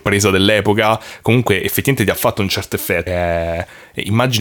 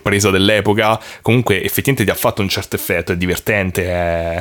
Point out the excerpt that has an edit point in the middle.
first; 1 cut; at 3.1 s

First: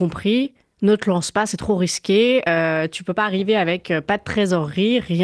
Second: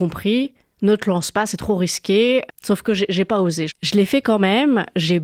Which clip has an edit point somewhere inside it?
second; 2 cuts; at 2.5 s, 3.7 s

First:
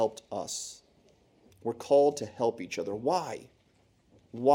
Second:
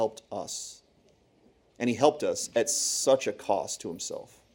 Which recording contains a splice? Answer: first; 1 cut; at 1.5 s

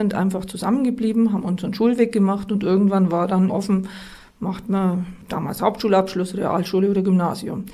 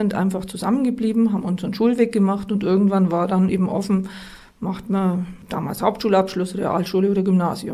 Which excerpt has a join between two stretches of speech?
first; 1 cut; at 3.5 s

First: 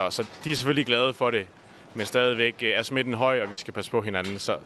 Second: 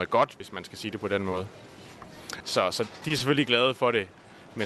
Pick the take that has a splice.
second; 1 cut; at 2.4 s

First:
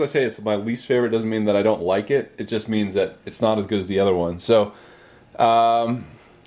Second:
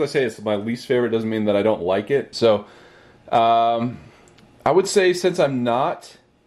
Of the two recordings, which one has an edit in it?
second; 1 cut; at 2.3 s

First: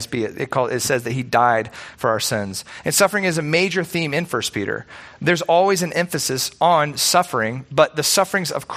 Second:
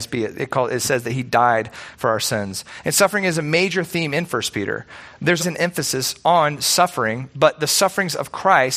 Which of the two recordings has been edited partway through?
second; 1 cut; at 5.4 s

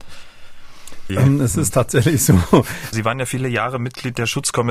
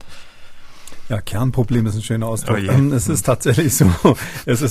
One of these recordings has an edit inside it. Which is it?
first; 2 cuts; at 1.1 s, 2.9 s

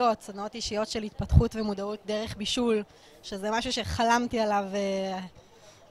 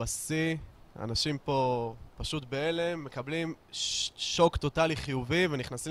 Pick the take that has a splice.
second; 1 cut; at 2.1 s

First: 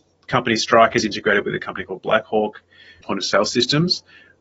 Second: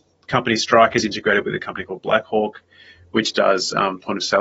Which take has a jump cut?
first; 1 cut; at 3.0 s

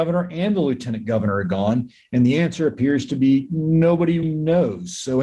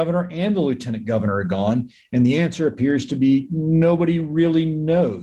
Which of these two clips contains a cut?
first; 1 cut; at 4.2 s

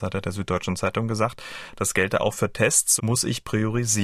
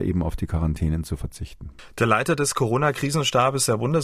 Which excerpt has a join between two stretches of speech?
first; 1 cut; at 3.0 s

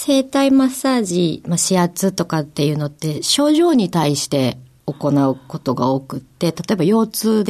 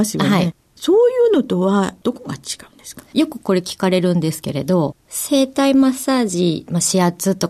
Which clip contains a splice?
second; 1 cut; at 5.0 s

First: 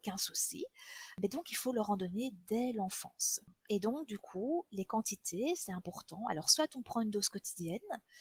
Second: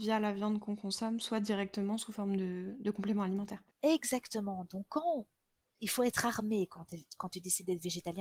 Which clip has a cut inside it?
second; 1 cut; at 3.7 s

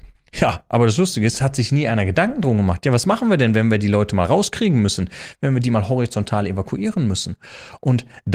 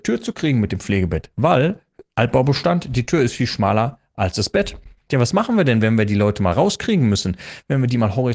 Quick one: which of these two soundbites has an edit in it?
second; 1 cut; at 5.1 s

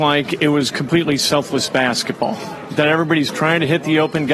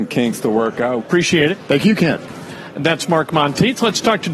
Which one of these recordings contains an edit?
second; 1 cut; at 1.0 s

